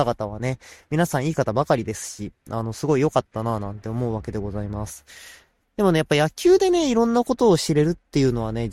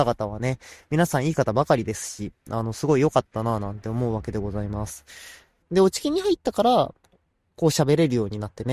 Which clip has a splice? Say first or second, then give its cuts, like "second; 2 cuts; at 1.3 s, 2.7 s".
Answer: second; 1 cut; at 5.6 s